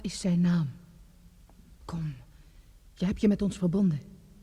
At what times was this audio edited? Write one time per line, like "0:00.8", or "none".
0:01.8